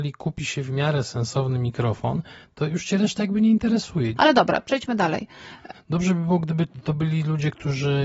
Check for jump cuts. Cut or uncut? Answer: cut